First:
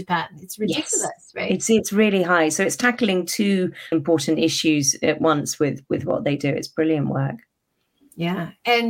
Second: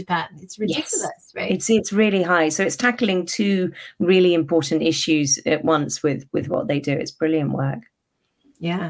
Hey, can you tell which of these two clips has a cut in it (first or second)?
first